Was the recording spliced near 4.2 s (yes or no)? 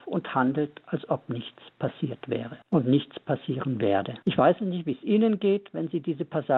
yes